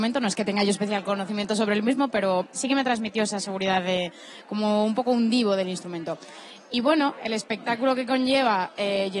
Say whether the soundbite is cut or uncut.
uncut